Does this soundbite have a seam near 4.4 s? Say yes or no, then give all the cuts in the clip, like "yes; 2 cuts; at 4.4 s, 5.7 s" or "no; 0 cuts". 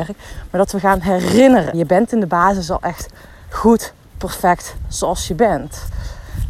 no; 1 cut; at 1.7 s